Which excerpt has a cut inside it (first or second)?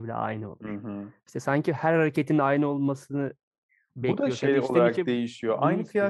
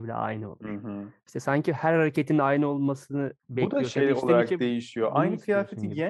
second